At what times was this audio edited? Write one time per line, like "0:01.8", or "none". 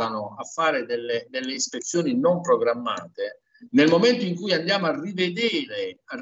none